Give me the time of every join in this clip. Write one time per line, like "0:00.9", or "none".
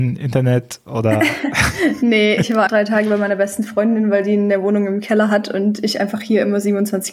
0:02.7

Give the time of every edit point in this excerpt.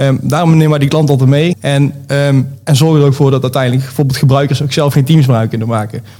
0:01.5

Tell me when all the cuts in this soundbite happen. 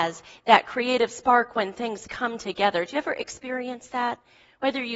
none

